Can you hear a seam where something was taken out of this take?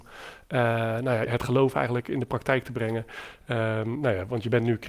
yes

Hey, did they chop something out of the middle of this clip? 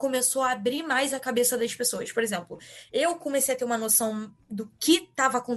no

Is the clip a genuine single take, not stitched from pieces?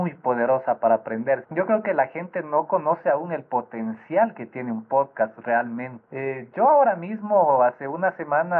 no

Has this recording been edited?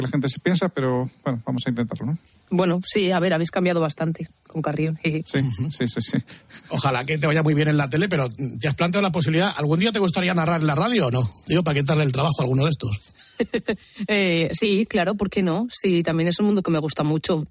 no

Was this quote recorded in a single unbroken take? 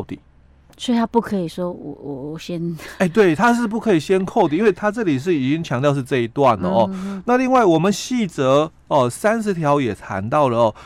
yes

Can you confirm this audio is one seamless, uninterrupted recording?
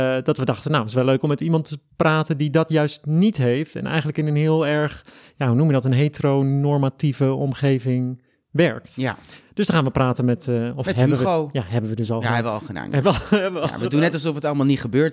yes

